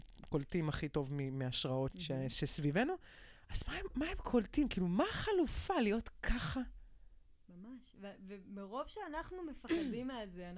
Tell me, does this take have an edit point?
yes; 1 cut; at 1.9 s

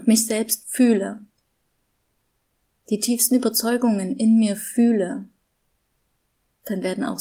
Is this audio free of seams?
yes; 0 cuts

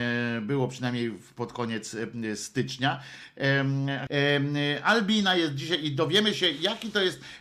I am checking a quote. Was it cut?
yes; 1 cut; at 4.1 s

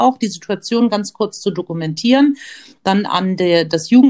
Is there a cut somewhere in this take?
no; 0 cuts

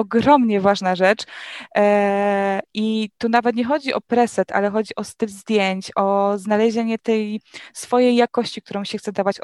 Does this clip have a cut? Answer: no; 0 cuts

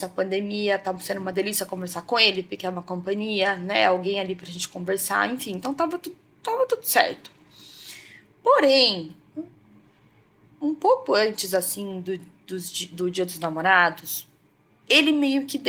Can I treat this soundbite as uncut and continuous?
yes; 0 cuts

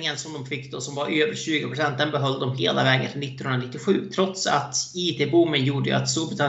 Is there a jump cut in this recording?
no; 0 cuts

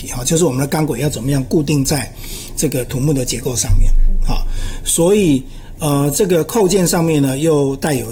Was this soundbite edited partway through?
no; 0 cuts

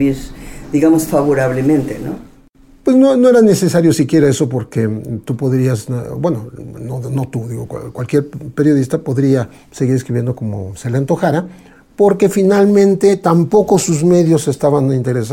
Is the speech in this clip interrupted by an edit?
no; 0 cuts

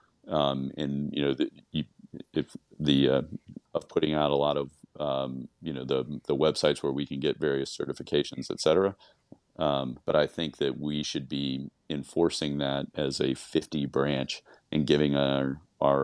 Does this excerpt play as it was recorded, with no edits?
no; 3 cuts; at 3.6 s, 10.0 s, 12.9 s

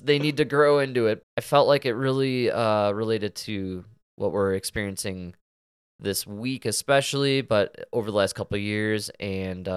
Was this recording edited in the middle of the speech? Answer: yes; 1 cut; at 1.2 s

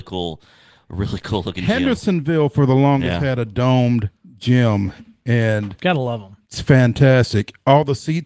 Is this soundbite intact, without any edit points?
no; 1 cut; at 6.4 s

